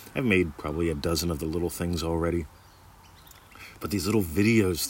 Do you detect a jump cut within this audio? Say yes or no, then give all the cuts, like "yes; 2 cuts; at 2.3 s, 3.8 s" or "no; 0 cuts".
no; 0 cuts